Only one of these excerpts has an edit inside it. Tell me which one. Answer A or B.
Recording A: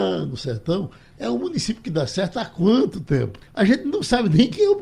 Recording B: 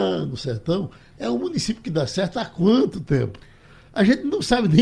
A